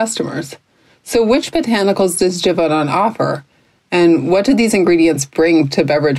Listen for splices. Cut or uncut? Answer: uncut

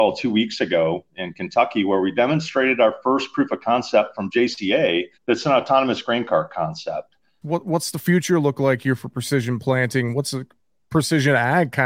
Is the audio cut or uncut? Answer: cut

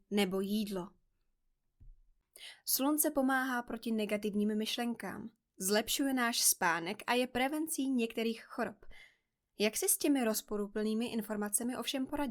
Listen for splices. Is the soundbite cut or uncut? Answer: uncut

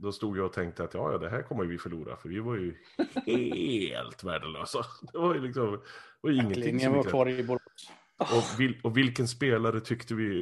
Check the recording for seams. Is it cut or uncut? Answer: cut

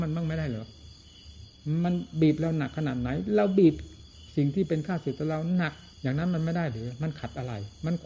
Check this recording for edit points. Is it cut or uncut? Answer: cut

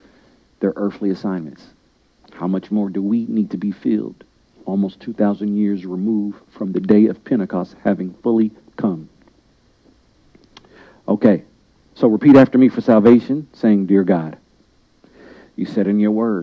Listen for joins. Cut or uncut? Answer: uncut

